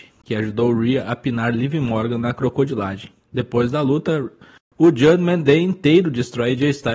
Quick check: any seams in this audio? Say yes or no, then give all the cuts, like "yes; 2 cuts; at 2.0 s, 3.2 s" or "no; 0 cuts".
no; 0 cuts